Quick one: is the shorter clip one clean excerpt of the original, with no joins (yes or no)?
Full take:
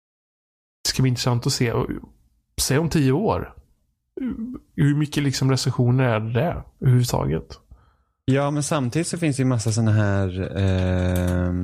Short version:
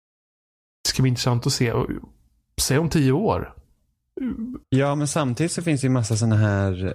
no